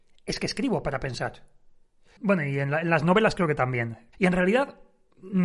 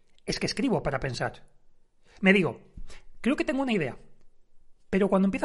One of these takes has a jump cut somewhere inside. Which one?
first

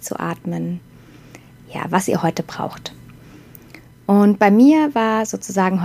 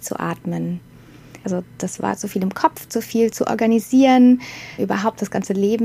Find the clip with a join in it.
second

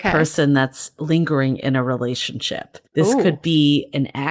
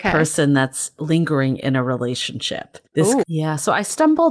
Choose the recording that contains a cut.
second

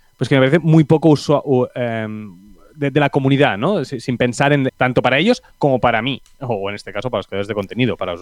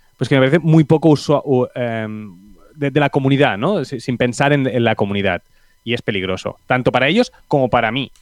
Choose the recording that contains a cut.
first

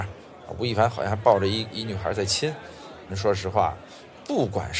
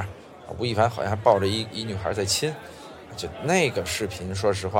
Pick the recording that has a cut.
first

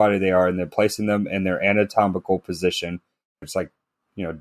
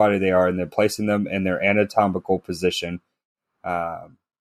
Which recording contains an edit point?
first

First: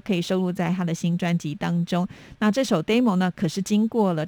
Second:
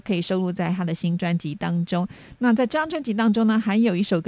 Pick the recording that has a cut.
second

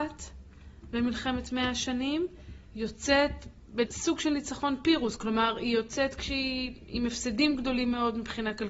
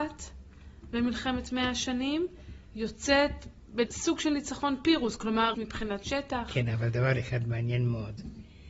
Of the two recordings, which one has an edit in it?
second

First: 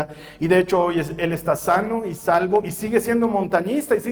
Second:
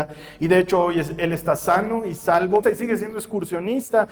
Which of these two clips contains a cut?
second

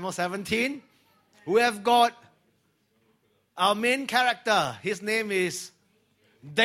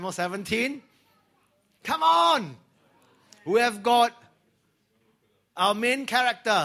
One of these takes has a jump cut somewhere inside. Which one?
first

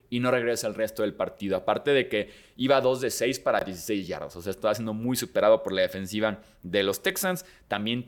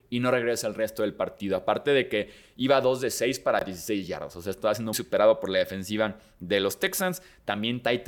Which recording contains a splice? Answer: second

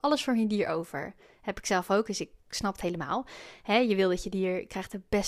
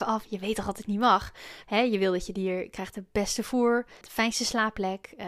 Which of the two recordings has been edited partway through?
second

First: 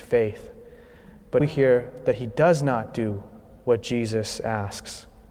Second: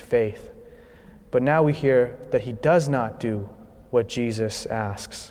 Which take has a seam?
first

